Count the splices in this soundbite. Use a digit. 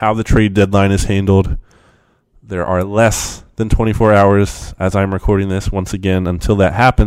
0